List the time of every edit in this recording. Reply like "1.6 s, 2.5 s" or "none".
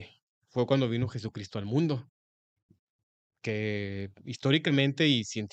none

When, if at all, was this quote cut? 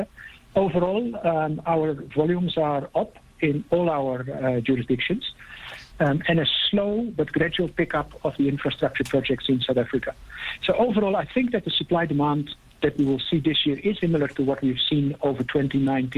5.9 s, 14.0 s

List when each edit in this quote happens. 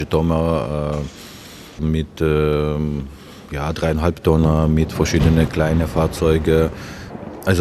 1.8 s

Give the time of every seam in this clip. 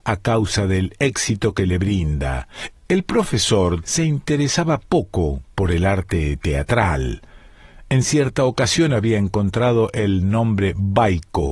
2.7 s, 3.8 s

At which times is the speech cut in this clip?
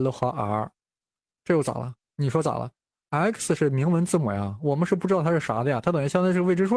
none

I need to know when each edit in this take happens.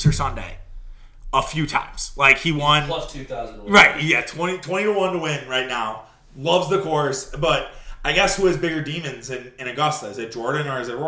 none

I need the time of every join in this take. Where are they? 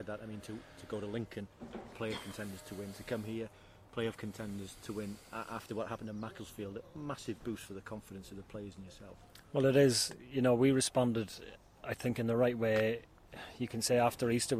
none

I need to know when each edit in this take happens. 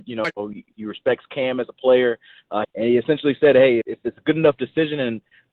2.6 s, 3.8 s

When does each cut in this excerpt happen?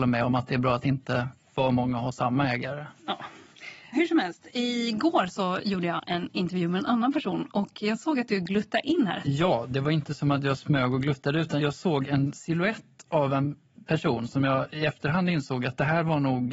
9.2 s, 11.6 s

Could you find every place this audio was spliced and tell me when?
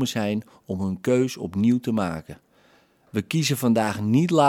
none

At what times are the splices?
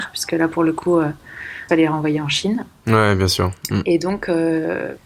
1.7 s

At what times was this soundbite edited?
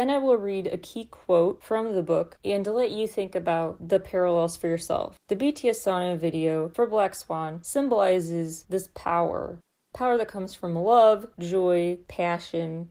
5.2 s

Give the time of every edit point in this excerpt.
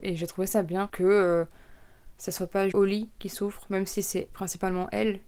2.7 s

